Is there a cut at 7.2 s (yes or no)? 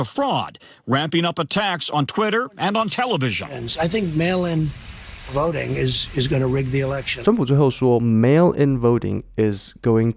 yes